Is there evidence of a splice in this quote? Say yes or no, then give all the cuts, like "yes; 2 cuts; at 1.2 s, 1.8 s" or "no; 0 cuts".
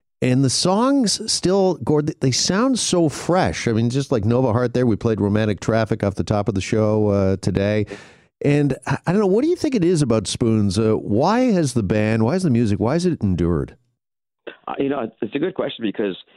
no; 0 cuts